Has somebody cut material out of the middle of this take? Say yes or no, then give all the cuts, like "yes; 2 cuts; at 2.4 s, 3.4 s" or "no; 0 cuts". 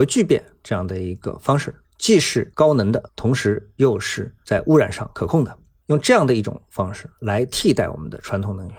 no; 0 cuts